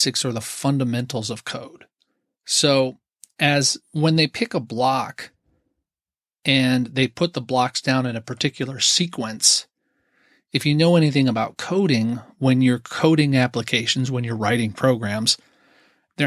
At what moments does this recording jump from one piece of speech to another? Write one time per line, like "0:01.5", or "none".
0:03.8